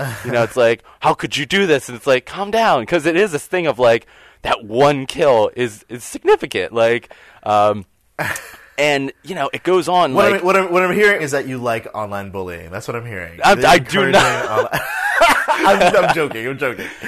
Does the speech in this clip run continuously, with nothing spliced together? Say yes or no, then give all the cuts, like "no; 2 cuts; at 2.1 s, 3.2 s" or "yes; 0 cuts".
no; 1 cut; at 11.2 s